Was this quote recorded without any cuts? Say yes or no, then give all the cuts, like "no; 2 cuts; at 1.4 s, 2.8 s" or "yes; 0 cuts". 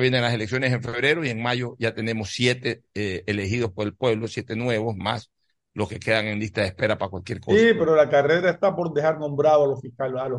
yes; 0 cuts